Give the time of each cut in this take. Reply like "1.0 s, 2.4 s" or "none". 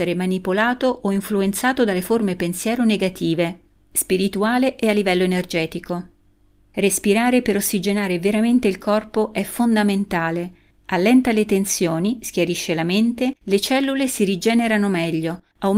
3.8 s